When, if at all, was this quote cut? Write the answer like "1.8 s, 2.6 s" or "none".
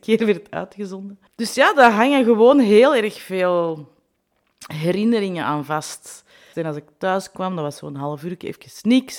1.3 s, 6.5 s